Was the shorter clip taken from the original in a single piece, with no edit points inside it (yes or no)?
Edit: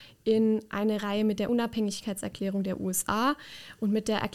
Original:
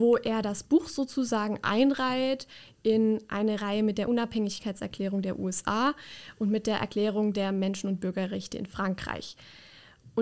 yes